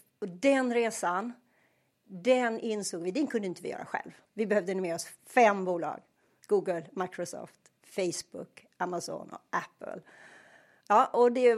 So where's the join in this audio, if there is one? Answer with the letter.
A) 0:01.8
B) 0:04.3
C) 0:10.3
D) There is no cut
B